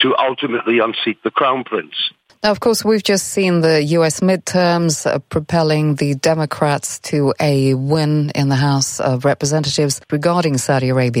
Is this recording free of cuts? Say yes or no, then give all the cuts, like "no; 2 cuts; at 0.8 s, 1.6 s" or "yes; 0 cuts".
no; 1 cut; at 10.1 s